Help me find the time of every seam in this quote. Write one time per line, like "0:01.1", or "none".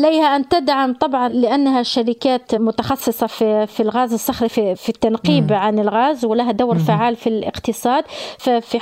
none